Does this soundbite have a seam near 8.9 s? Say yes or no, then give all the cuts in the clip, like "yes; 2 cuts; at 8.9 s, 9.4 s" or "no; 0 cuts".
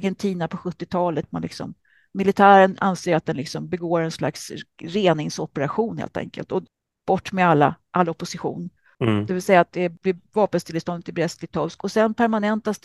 yes; 2 cuts; at 1.2 s, 8.9 s